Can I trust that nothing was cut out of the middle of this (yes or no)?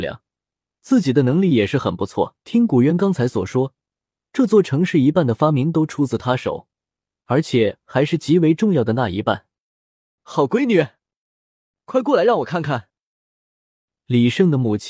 no